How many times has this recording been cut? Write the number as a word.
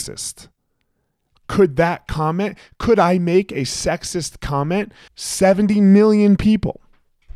one